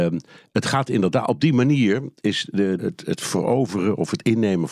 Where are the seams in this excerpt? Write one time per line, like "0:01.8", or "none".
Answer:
0:02.8